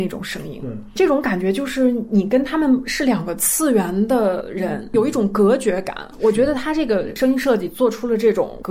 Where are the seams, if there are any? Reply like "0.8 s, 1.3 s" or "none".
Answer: none